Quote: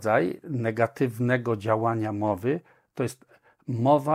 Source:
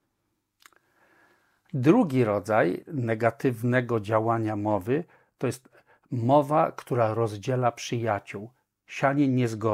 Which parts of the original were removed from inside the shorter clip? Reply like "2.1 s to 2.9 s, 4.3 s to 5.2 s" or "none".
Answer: none

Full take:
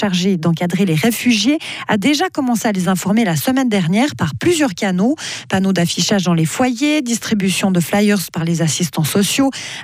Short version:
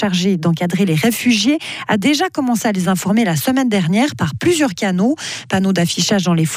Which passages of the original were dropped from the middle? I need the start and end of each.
none

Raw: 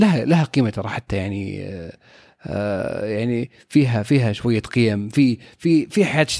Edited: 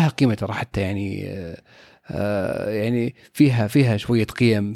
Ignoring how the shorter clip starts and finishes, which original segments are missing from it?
none

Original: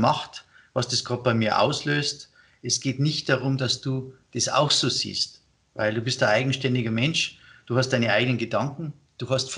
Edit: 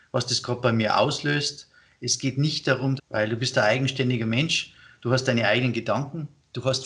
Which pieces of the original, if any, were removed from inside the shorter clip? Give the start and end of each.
3.6 s to 5.6 s

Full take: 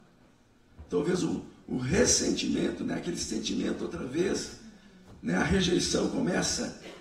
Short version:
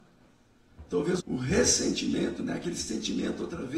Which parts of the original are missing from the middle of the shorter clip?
1.2 s to 1.6 s

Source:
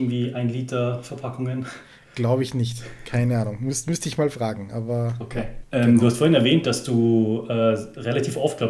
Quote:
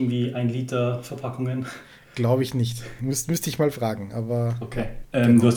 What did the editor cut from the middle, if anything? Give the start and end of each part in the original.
3.0 s to 3.6 s

